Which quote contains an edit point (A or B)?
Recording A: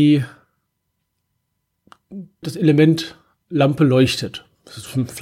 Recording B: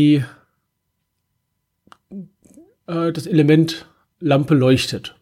A